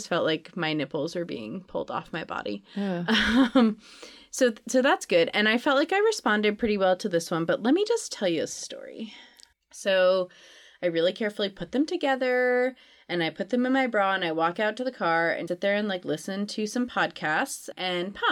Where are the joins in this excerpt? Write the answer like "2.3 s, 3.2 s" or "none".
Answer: 9.5 s, 15.5 s